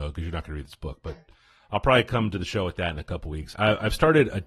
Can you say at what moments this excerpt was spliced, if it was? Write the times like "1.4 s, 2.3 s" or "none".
3.5 s

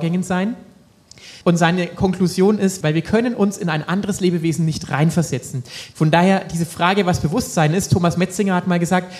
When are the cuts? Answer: 1.4 s, 2.8 s, 5.9 s

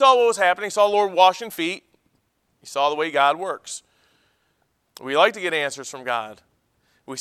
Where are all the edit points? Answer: 4.8 s

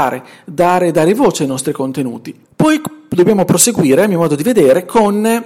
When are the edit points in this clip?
2.4 s

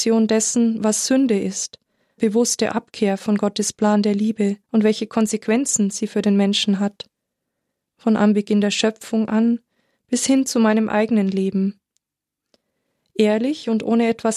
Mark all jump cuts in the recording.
2.2 s, 4.6 s

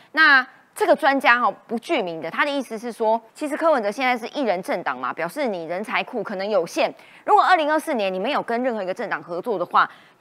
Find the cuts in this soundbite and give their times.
3.3 s

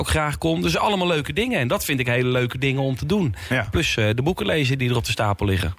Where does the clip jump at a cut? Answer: 4.8 s

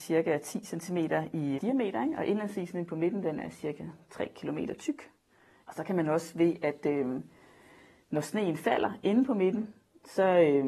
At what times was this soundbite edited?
1.6 s, 5.6 s

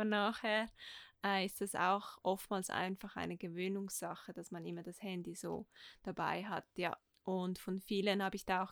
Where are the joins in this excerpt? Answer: none

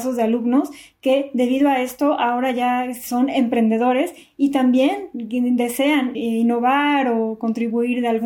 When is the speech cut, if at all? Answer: 6.1 s

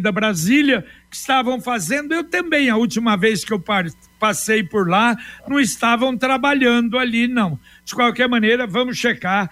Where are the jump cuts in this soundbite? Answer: none

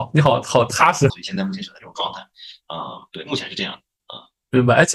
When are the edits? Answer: 1.1 s

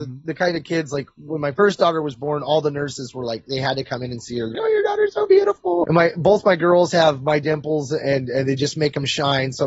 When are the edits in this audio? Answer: 4.5 s, 5.8 s

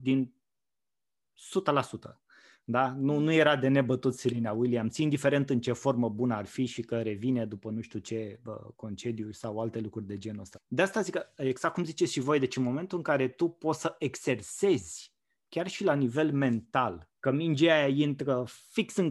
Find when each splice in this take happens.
10.5 s, 17.2 s

